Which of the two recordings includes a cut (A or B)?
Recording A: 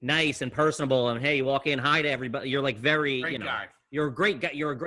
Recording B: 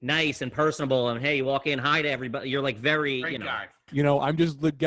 B